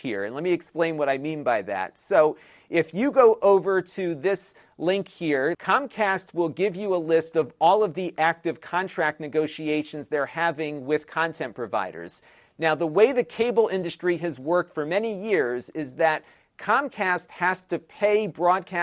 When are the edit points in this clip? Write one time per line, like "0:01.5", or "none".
0:05.5